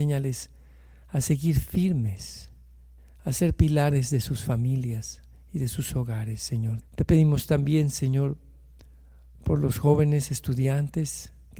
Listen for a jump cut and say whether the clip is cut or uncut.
cut